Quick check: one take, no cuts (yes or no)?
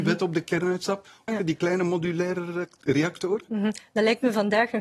no